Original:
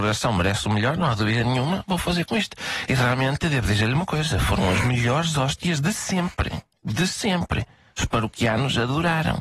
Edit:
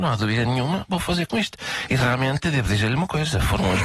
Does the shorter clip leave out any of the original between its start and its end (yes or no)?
no